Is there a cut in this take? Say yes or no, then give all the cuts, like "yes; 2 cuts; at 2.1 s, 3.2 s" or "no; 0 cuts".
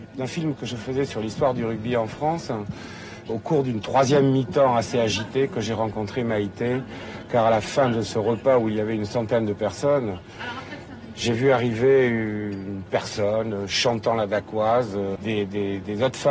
yes; 2 cuts; at 3.3 s, 15.2 s